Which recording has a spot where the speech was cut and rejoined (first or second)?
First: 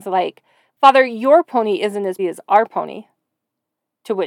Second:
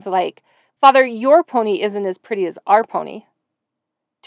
first